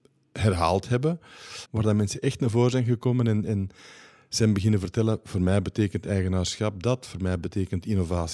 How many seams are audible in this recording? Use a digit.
1